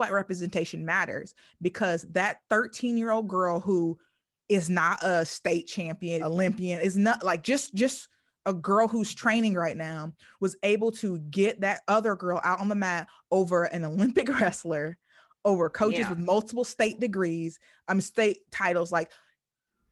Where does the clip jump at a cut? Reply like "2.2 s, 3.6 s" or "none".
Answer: 6.2 s